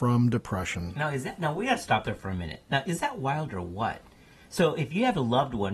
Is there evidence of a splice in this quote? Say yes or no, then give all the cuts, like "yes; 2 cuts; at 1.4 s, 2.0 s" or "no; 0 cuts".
no; 0 cuts